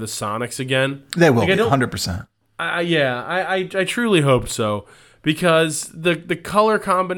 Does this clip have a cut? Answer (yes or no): no